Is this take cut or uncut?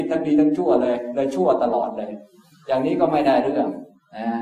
uncut